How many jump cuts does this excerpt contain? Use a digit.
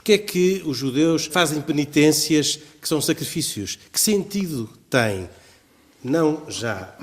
1